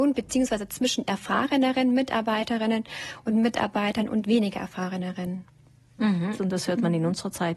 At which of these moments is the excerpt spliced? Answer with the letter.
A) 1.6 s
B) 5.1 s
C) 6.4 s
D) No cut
C